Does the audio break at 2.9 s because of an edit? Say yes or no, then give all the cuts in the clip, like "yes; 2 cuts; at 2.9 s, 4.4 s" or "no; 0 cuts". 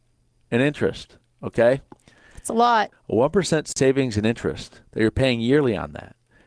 yes; 2 cuts; at 2.9 s, 4.9 s